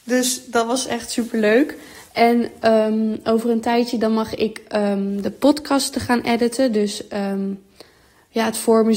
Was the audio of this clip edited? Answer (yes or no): no